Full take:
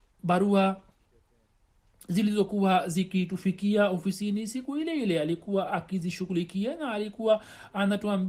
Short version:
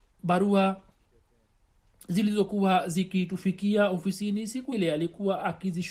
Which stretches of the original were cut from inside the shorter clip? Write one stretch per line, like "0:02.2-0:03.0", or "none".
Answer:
0:04.7-0:05.0